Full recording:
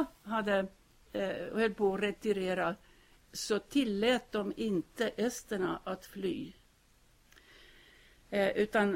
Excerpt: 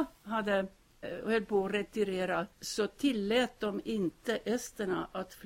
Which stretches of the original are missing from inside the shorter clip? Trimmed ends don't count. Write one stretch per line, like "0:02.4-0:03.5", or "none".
0:01.0-0:01.3
0:02.8-0:03.2